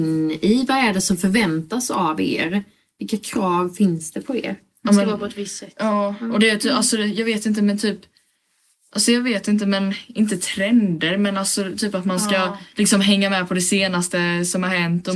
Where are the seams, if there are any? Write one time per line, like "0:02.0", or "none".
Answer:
none